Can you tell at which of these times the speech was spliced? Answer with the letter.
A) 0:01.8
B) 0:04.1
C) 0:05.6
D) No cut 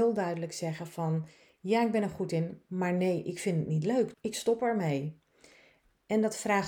B